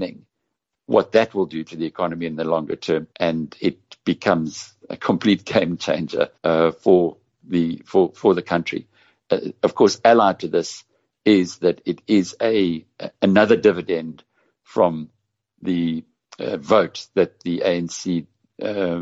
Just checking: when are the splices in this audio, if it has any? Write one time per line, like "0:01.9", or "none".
0:03.1
0:06.4